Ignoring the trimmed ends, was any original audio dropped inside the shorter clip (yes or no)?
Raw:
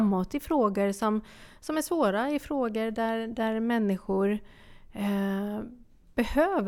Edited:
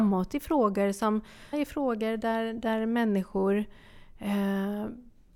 yes